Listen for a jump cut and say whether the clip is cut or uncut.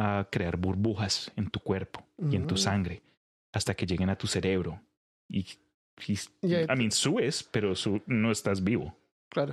uncut